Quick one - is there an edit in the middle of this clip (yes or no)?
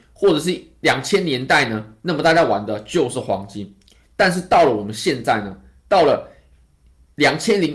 no